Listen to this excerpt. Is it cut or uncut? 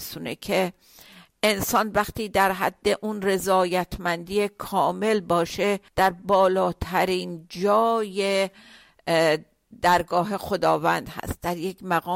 cut